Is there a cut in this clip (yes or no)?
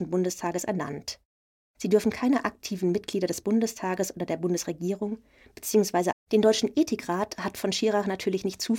yes